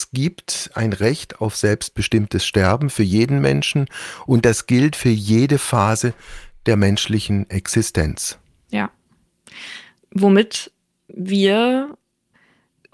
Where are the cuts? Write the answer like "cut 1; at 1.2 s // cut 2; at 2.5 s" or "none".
none